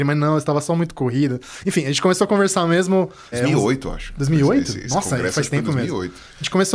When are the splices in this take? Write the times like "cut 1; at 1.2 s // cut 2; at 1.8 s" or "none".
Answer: cut 1; at 3.3 s